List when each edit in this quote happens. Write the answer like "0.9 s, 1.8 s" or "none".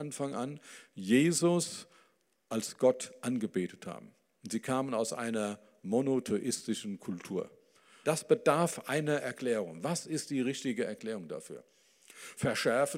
8.0 s